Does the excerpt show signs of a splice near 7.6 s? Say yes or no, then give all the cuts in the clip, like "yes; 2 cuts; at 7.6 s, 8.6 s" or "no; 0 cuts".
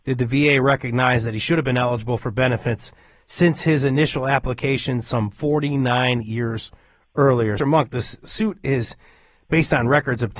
yes; 1 cut; at 7.6 s